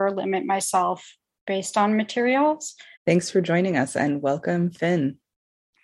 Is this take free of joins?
no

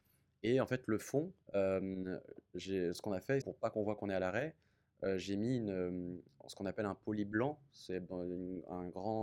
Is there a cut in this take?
yes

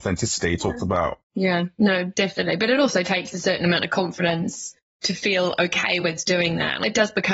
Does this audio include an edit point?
yes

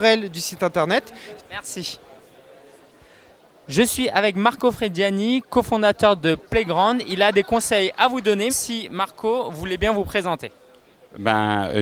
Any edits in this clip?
yes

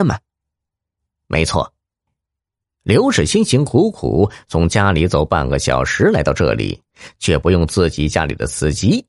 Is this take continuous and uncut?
no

